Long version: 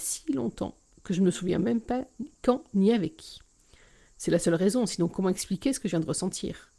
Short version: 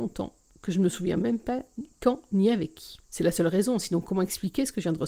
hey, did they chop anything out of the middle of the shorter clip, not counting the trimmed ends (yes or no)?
yes